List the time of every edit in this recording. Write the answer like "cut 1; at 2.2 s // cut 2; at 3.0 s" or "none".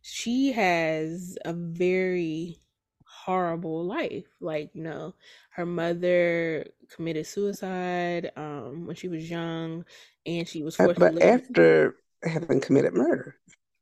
none